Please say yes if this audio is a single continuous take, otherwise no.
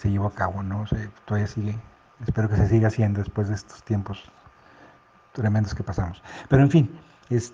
yes